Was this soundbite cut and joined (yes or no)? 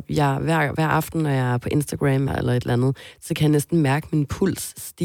yes